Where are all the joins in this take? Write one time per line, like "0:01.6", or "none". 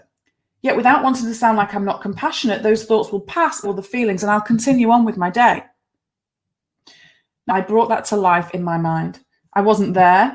0:03.6
0:07.5

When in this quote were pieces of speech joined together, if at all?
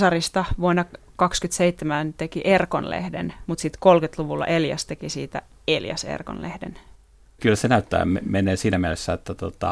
0:03.5
0:07.4

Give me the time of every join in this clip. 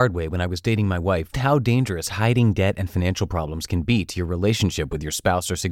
0:01.3

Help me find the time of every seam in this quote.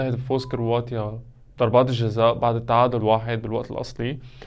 0:03.0

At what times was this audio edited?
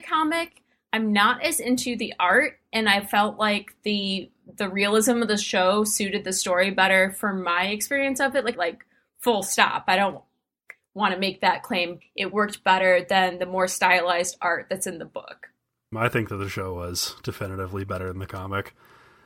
0:08.5
0:12.0
0:15.9

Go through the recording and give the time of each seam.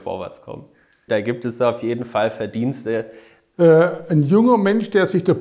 0:01.1
0:03.5

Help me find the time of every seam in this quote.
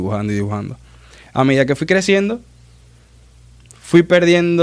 none

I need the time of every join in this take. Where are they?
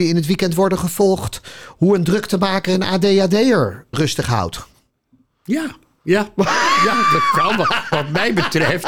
0:03.9

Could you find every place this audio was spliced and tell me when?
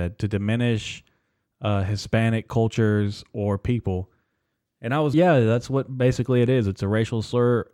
0:05.1

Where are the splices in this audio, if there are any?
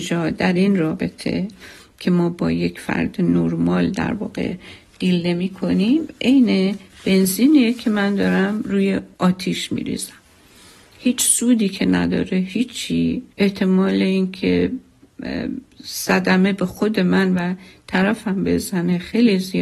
0:09.1
0:13.3

